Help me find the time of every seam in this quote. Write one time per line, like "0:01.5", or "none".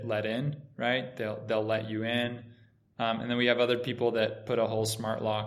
none